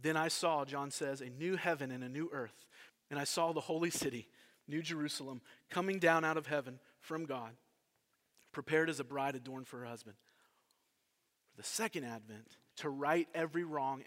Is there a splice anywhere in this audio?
yes; 3 cuts; at 2.9 s, 11.3 s, 12.7 s

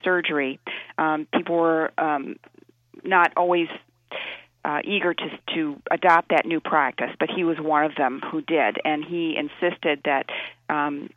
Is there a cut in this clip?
no; 0 cuts

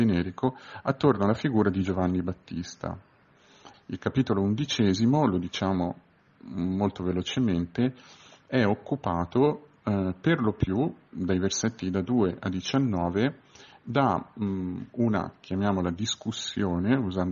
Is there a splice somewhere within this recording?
yes; 1 cut; at 3.7 s

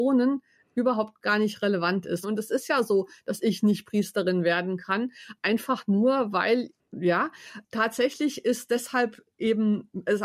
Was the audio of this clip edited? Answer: yes; 1 cut; at 2.2 s

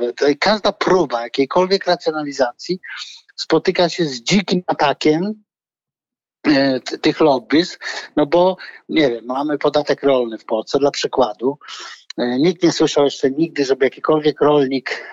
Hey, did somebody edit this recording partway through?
no; 0 cuts

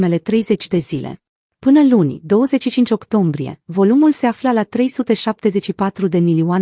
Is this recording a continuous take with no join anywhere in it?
no; 1 cut; at 1.5 s

